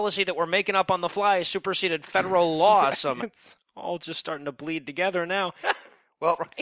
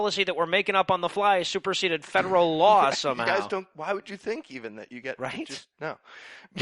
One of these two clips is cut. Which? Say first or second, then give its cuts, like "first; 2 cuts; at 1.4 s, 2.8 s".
first; 2 cuts; at 3.2 s, 5.6 s